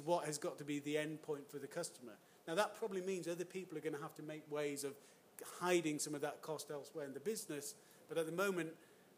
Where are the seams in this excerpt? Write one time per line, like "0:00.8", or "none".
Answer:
none